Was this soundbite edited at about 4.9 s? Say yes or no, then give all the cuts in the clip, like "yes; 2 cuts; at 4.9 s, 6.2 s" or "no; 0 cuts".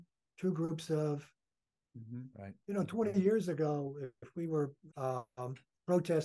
yes; 2 cuts; at 2.3 s, 4.9 s